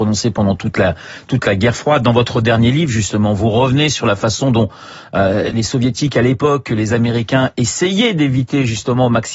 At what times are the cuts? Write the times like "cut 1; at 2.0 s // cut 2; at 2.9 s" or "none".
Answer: cut 1; at 5.5 s